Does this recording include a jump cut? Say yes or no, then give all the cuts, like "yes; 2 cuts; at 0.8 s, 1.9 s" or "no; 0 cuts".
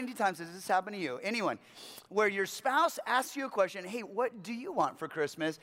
no; 0 cuts